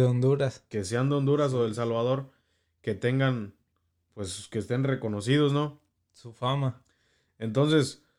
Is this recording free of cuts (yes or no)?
yes